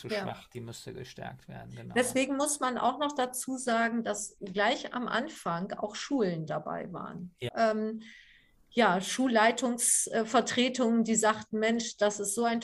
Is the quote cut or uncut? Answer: cut